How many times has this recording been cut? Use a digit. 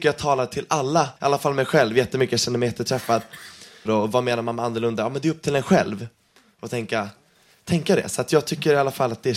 2